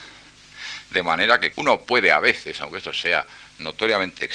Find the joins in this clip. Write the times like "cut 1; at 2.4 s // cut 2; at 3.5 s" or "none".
cut 1; at 1.5 s

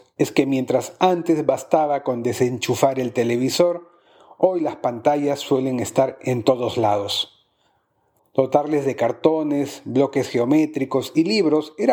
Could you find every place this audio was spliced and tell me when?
cut 1; at 8.2 s

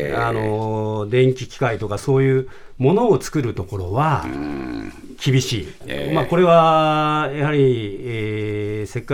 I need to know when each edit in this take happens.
cut 1; at 5.8 s

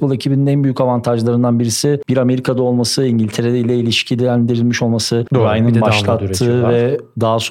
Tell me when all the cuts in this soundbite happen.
cut 1; at 5.3 s

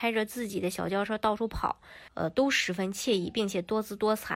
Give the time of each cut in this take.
cut 1; at 2.1 s

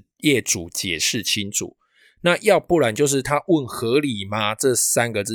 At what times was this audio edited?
none

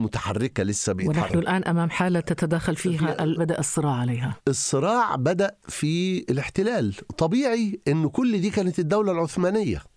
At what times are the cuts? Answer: cut 1; at 3.4 s // cut 2; at 4.4 s

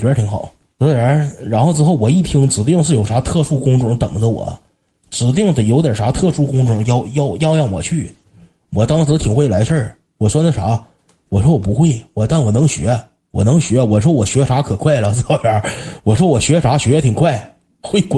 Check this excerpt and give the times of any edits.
none

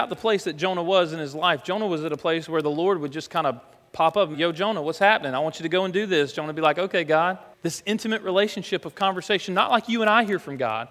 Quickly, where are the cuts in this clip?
cut 1; at 4.3 s // cut 2; at 7.5 s

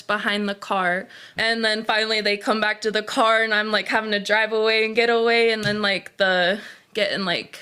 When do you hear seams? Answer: cut 1; at 1.4 s

